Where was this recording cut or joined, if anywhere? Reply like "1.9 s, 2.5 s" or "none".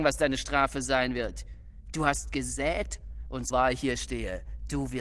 3.5 s